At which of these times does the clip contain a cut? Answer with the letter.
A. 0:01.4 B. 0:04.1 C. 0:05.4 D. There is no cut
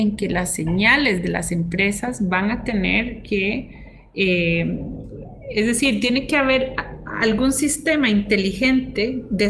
D